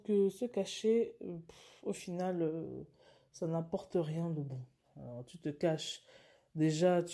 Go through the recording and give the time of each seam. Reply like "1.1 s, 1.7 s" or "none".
none